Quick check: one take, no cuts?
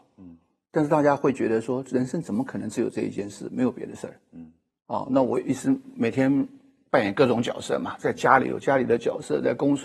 yes; 0 cuts

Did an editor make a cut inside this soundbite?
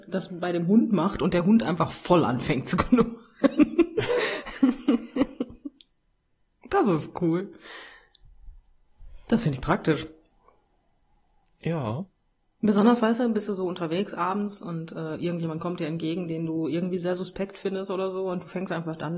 no; 0 cuts

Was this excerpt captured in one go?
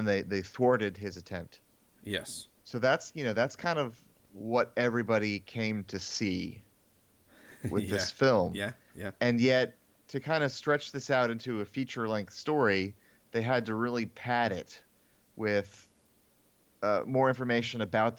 no; 1 cut; at 2.6 s

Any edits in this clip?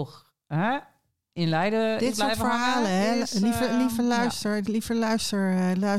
no; 0 cuts

